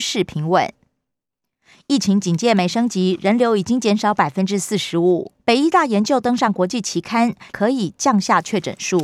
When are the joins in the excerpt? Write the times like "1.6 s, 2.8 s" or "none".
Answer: 5.4 s, 7.5 s